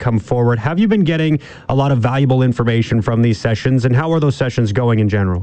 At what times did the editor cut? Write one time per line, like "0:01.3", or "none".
none

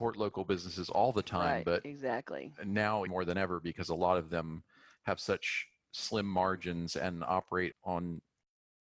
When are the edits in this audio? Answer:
0:03.1
0:07.7

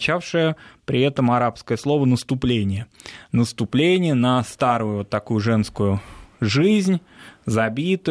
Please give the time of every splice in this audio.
none

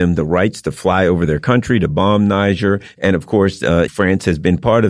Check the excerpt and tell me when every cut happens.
0:03.9

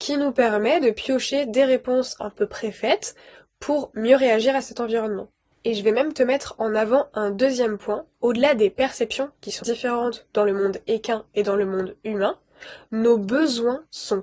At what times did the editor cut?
0:05.5
0:09.6

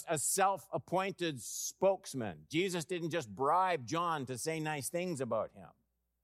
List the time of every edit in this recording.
none

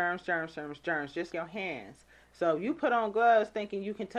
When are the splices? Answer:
0:01.3

